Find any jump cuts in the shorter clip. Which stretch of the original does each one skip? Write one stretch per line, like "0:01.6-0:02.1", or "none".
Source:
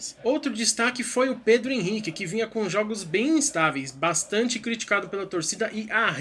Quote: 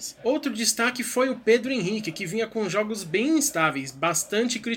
none